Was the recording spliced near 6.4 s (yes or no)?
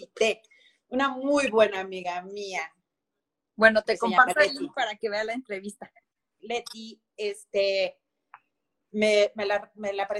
yes